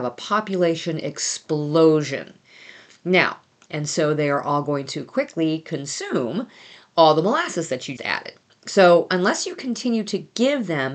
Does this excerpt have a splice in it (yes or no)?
yes